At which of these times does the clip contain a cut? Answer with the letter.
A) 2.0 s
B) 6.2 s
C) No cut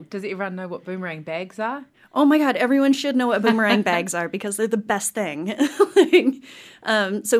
C